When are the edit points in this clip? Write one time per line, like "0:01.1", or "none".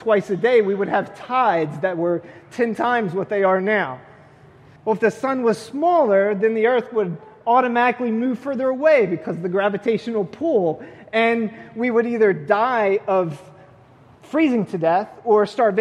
0:04.8